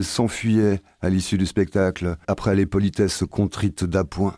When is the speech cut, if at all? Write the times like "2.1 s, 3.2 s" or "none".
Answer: 2.2 s